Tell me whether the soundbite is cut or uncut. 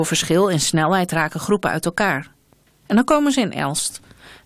cut